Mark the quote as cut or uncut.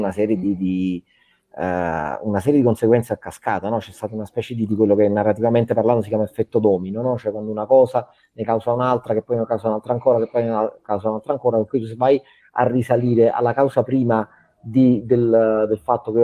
uncut